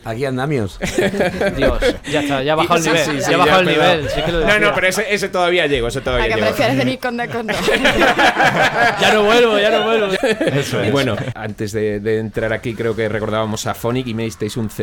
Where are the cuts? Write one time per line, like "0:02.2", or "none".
0:10.2
0:11.3